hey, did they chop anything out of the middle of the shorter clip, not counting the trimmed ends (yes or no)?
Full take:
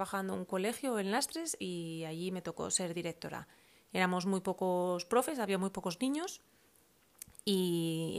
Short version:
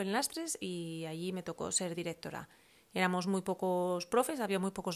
no